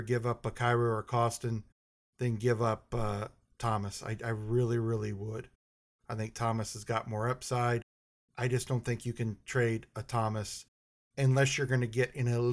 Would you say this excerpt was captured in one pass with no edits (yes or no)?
yes